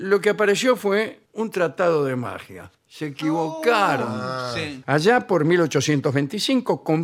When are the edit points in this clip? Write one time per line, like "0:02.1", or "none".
0:01.3
0:02.8
0:04.8